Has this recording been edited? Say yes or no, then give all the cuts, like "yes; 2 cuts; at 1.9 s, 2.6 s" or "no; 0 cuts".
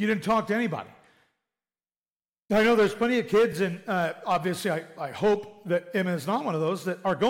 no; 0 cuts